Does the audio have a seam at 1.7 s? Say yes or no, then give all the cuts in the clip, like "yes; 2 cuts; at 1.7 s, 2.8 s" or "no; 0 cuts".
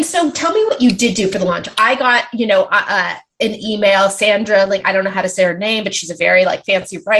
no; 0 cuts